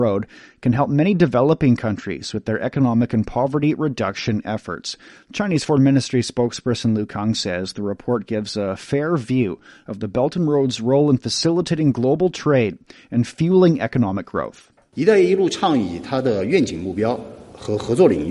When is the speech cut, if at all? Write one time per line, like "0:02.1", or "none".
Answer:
none